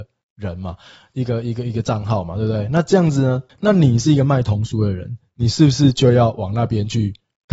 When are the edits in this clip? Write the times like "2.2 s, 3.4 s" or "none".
3.5 s